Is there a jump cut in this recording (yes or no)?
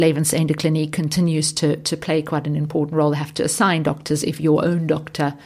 no